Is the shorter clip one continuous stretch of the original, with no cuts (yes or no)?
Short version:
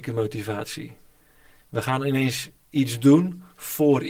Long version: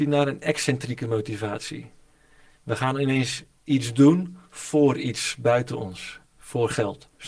yes